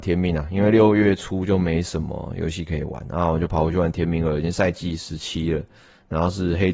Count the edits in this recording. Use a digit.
0